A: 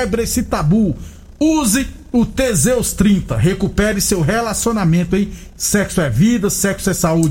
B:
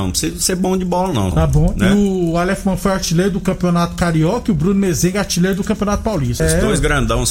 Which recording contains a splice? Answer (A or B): B